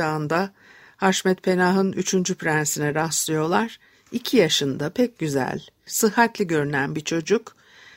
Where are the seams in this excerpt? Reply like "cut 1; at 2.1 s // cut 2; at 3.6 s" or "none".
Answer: cut 1; at 5.9 s